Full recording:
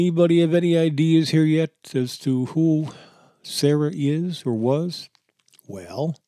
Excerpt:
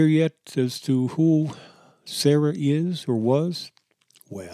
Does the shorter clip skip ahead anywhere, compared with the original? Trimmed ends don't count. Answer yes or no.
no